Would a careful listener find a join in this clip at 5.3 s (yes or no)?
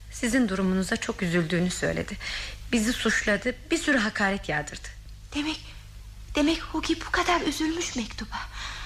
yes